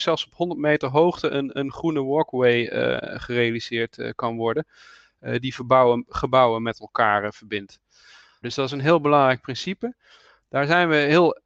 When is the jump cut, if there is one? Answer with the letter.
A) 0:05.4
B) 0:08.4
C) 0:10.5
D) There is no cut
B